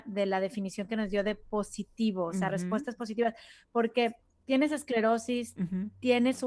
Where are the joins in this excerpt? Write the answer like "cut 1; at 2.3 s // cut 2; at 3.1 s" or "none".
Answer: none